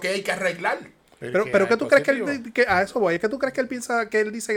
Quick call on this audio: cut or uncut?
uncut